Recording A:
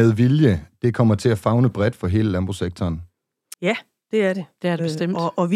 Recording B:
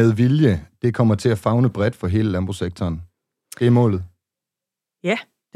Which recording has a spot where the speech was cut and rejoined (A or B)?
A